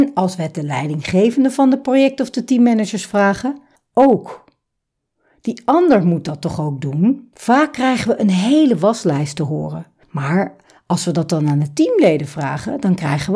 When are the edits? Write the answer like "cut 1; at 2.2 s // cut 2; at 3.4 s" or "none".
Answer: cut 1; at 7.3 s